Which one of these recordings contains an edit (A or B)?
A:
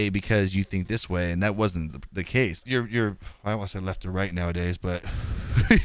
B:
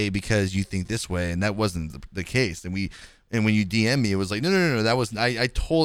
A